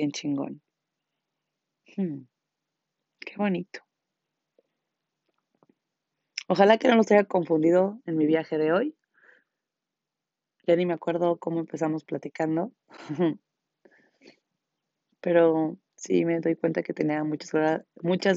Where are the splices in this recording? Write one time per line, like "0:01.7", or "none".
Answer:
0:01.8

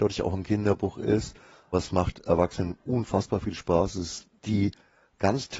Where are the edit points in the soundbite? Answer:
none

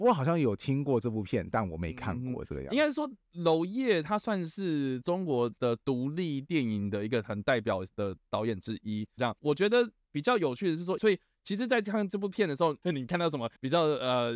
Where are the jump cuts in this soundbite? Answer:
0:09.2
0:11.0
0:12.8

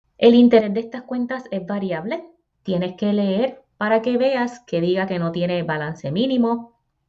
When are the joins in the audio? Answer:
0:02.5

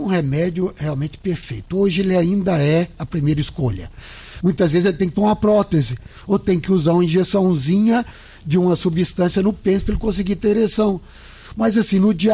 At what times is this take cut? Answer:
0:04.4

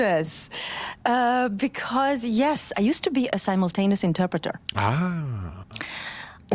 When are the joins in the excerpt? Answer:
0:02.7

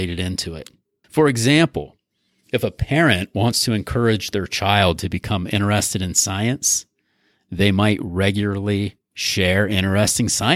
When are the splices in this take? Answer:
0:01.0
0:09.0

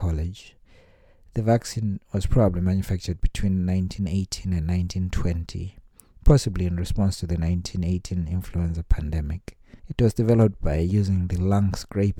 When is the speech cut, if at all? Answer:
0:09.8

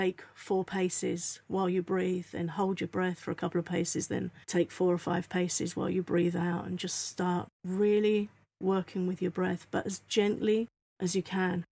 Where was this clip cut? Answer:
0:04.4
0:07.5

